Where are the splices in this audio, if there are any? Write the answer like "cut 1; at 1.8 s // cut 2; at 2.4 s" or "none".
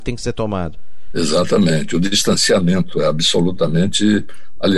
none